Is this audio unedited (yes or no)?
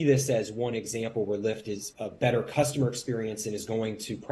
no